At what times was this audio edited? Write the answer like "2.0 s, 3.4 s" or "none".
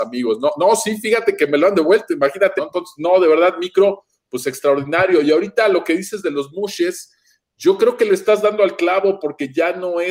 2.6 s

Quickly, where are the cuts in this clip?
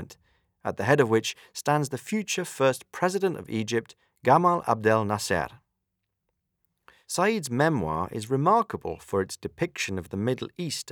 none

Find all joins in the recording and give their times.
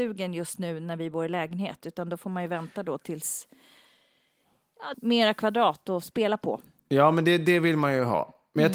4.9 s, 6.8 s

